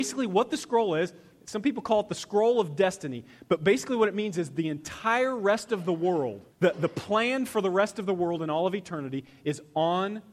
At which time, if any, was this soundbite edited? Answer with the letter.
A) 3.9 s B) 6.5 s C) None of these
B